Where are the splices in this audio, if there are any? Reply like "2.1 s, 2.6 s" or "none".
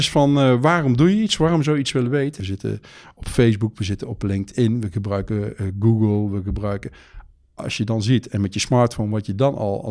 2.4 s

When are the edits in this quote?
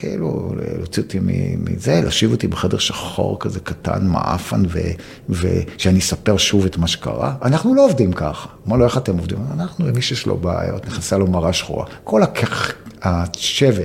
none

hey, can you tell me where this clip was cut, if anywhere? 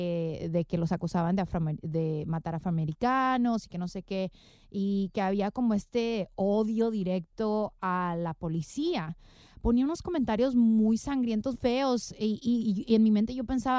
11.5 s

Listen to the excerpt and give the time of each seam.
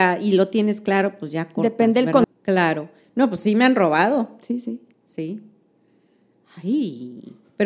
2.2 s

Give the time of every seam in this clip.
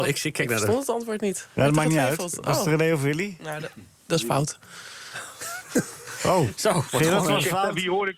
none

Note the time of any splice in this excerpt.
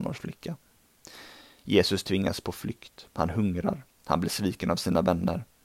none

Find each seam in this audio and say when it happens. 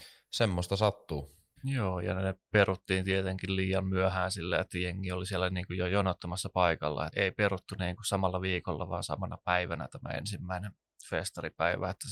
1.6 s, 7.1 s

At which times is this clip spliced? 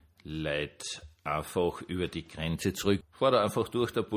3.0 s

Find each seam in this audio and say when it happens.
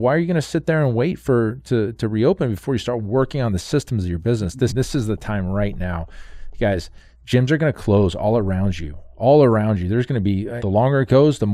4.7 s, 10.6 s

